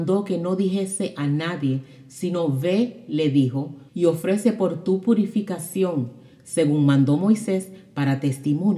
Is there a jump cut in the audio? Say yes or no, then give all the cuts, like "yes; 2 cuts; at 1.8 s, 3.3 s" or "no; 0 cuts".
yes; 1 cut; at 3.9 s